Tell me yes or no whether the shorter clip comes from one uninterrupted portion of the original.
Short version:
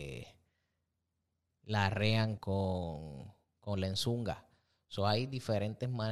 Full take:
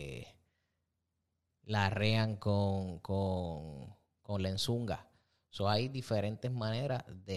no